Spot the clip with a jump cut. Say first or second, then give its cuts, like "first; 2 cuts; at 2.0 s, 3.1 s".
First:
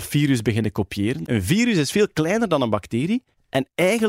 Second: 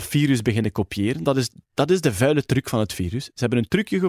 first; 1 cut; at 1.2 s